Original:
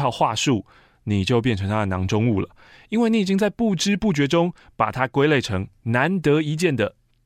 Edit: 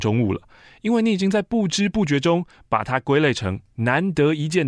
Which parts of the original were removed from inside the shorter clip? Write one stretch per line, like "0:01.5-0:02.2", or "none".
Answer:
none